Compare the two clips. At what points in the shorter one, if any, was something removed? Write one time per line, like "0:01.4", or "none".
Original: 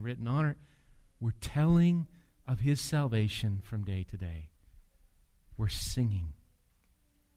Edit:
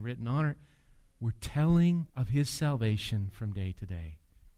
0:02.1